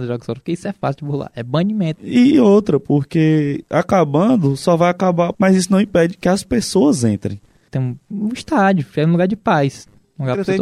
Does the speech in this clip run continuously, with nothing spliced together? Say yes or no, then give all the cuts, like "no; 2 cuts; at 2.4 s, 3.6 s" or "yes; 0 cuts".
no; 3 cuts; at 2.0 s, 5.3 s, 7.7 s